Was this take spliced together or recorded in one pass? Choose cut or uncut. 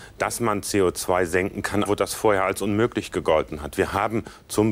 cut